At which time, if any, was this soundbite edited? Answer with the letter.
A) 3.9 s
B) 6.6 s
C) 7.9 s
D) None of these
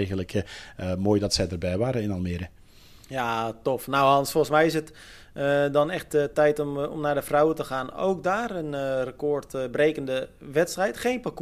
D